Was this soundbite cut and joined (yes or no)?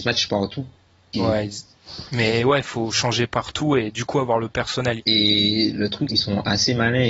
yes